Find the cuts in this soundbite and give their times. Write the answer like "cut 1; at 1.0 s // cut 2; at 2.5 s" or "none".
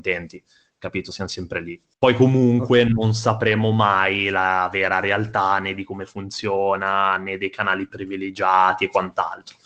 none